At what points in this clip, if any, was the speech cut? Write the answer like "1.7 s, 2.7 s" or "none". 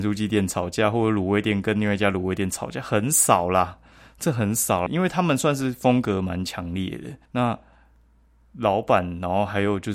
4.9 s, 7.2 s